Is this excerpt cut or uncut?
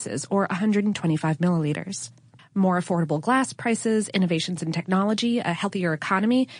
cut